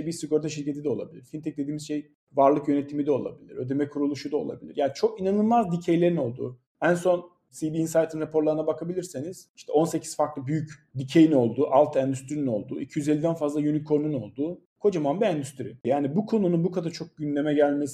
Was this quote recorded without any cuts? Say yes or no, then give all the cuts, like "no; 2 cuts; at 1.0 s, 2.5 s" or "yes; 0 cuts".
no; 1 cut; at 15.8 s